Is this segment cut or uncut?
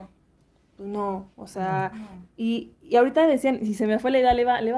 uncut